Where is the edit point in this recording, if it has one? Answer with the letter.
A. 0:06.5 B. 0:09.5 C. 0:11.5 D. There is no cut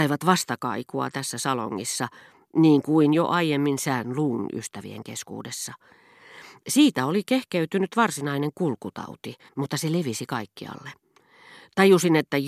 B